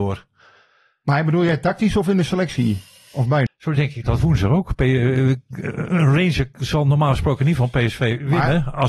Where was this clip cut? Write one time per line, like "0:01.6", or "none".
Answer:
0:03.5